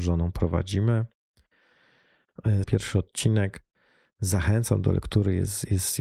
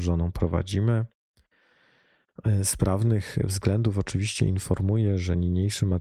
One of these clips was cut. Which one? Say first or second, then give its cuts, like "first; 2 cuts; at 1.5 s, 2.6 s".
first; 1 cut; at 2.6 s